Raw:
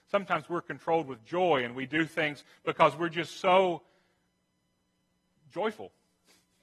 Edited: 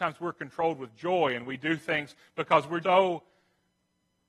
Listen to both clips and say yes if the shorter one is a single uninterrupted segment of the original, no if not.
no